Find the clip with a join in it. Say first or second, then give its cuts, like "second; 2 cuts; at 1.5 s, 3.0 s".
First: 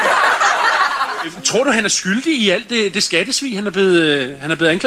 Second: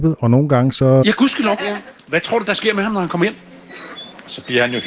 second; 2 cuts; at 1.0 s, 2.4 s